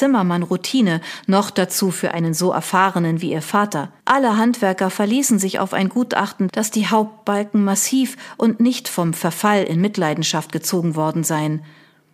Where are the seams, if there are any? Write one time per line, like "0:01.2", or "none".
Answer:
0:04.0
0:06.5